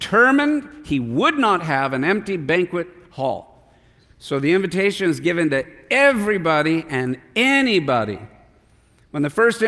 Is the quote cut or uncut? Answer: uncut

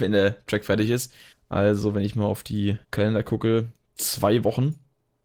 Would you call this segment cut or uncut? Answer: cut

